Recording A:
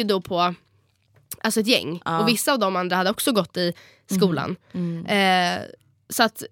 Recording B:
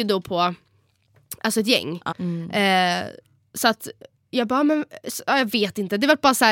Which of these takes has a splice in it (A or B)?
B